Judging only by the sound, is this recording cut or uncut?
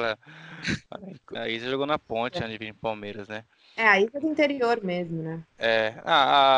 cut